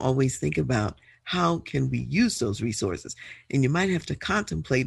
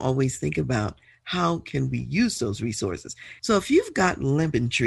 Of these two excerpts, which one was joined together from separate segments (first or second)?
second